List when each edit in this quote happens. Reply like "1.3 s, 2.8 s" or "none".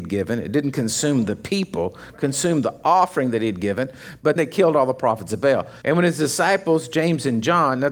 4.4 s, 5.8 s